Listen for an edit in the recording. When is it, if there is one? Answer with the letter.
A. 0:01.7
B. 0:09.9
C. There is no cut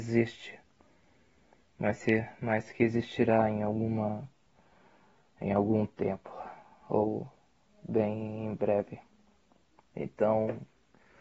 B